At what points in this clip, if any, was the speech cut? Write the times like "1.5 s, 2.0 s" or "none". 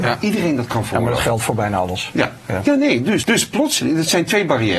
3.2 s

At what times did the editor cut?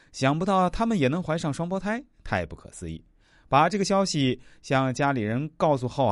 none

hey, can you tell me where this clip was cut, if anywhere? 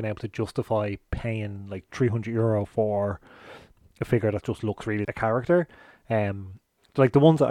5.0 s

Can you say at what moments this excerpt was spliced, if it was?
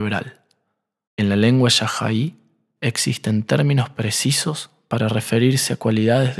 1.1 s

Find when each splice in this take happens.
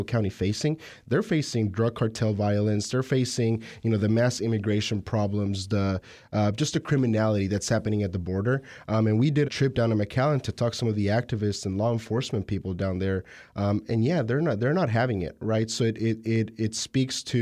9.4 s

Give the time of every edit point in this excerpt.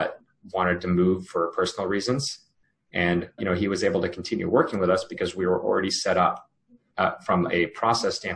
3.4 s

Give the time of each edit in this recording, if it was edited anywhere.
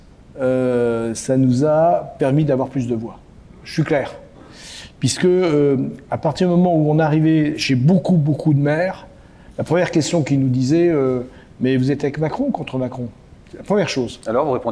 none

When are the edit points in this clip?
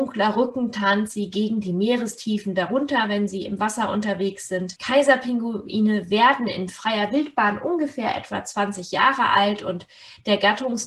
none

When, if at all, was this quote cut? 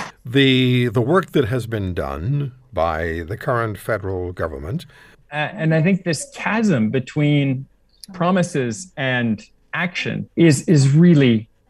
5.1 s, 10.3 s

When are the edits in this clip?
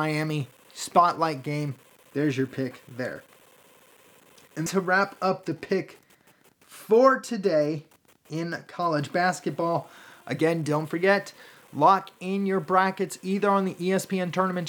4.7 s

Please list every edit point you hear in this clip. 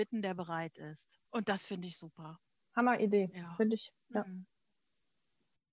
1.3 s

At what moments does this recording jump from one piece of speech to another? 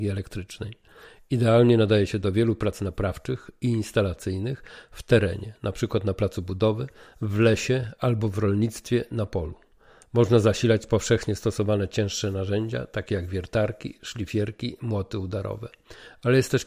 none

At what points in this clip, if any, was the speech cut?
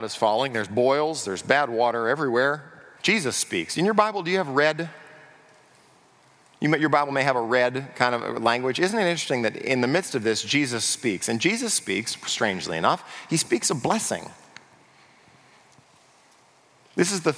3.0 s

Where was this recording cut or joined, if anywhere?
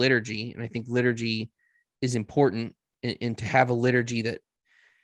none

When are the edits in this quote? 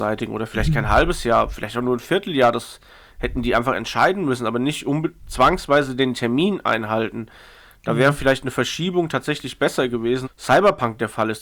10.2 s

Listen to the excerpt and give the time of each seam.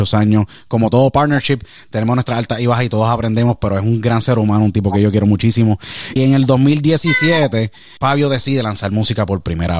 6.2 s, 8.0 s

